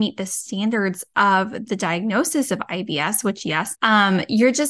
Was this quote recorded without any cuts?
no; 1 cut; at 3.7 s

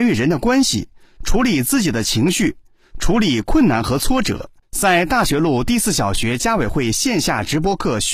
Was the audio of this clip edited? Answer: yes; 1 cut; at 4.6 s

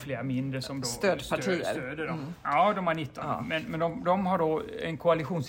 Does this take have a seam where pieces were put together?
yes; 1 cut; at 2.4 s

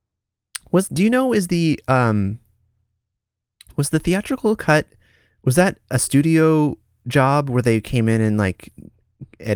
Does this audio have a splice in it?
no; 0 cuts

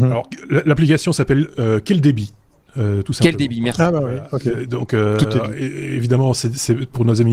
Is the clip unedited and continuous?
yes; 0 cuts

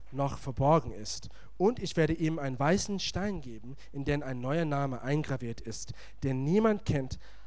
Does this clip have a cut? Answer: no; 0 cuts

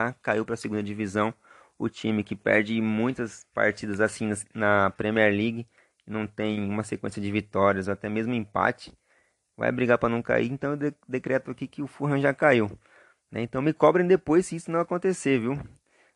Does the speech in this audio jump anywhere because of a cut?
no; 0 cuts

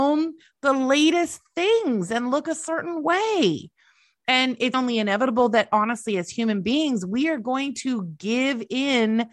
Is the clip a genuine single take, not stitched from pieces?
no; 1 cut; at 4.7 s

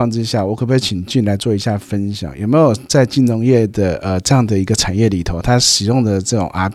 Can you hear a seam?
no; 0 cuts

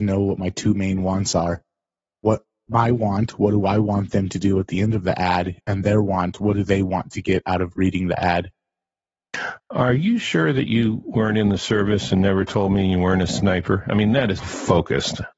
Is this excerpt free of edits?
no; 1 cut; at 14.4 s

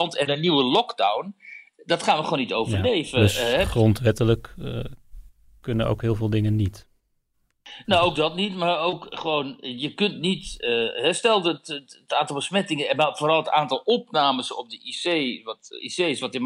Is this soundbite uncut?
yes; 0 cuts

